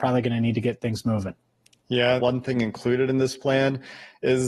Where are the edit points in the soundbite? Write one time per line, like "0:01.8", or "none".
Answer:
0:02.2